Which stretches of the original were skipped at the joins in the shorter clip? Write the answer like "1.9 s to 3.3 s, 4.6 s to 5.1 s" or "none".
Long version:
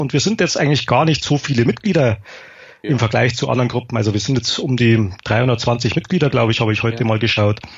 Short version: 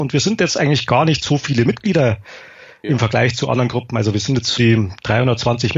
4.6 s to 4.8 s